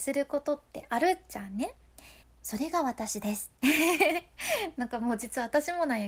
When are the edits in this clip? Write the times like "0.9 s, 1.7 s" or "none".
2.2 s